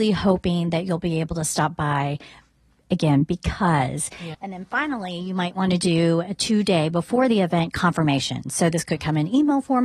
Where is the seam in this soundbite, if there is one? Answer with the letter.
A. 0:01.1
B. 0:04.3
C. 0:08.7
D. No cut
B